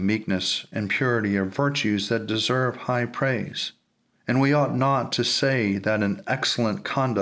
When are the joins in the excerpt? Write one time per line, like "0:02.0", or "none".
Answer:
0:04.1